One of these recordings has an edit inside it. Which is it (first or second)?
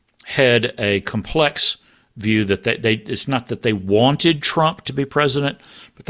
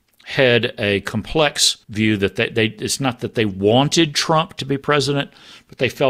second